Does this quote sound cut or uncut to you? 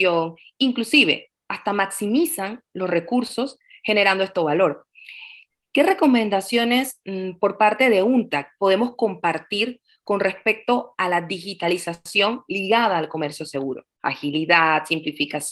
cut